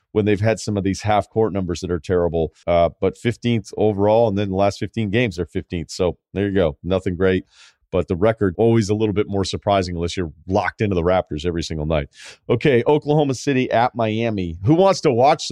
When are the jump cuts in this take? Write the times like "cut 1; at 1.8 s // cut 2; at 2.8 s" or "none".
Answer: cut 1; at 2.6 s // cut 2; at 8.6 s